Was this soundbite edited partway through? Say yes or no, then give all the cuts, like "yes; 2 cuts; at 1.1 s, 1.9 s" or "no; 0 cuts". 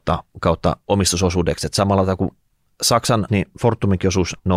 yes; 1 cut; at 3.3 s